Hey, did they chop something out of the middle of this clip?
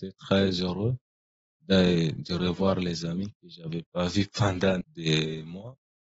yes; 1 cut; at 4.8 s

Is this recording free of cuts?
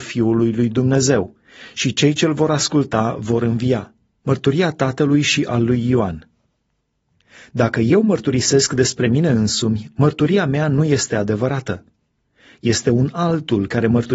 no; 1 cut; at 4.2 s

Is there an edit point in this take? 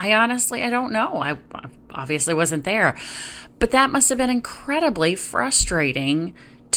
no; 0 cuts

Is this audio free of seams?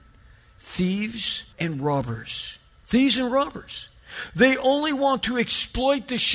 no; 1 cut; at 1.5 s

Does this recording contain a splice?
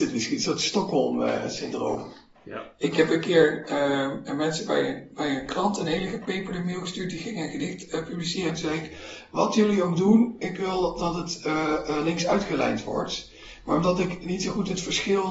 no; 0 cuts

